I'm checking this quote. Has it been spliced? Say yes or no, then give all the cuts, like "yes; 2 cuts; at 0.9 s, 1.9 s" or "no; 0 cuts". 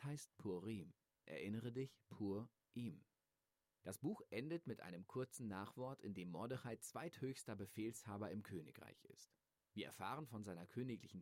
yes; 1 cut; at 1.2 s